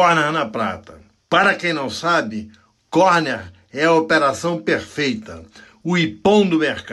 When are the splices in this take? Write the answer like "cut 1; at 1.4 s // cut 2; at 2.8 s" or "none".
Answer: none